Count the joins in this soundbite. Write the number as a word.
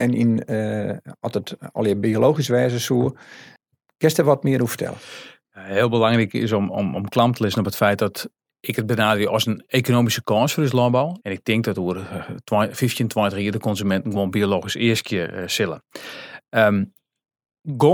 one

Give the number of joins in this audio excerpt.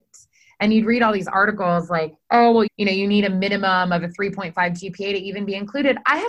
one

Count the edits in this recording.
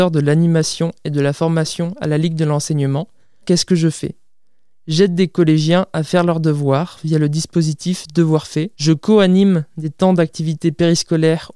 two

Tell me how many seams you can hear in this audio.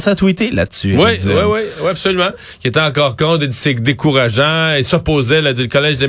zero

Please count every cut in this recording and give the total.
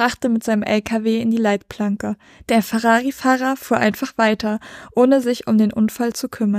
zero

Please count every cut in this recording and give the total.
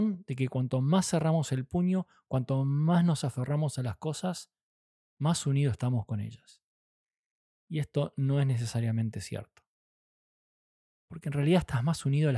zero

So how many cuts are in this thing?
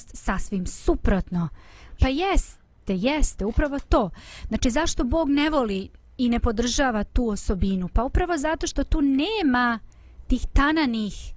one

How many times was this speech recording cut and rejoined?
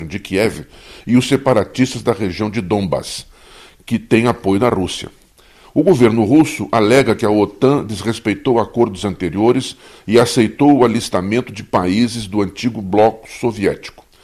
one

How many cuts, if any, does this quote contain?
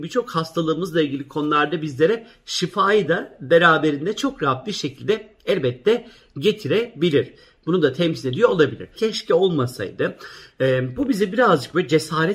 two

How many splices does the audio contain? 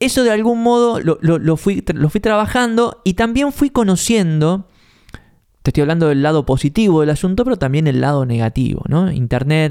one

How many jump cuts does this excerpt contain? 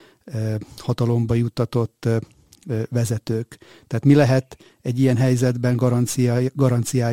zero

